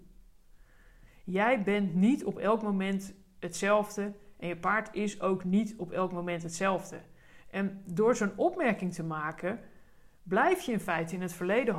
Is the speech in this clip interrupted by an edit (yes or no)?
yes